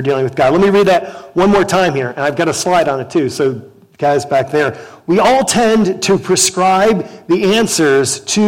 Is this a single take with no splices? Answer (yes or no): yes